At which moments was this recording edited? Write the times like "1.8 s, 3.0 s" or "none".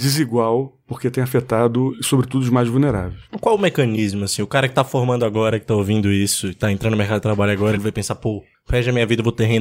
none